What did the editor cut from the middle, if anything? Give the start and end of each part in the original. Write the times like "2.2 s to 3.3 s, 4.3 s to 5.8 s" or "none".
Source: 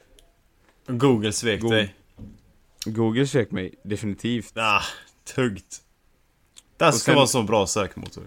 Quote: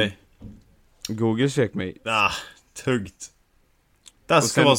3.8 s to 4.5 s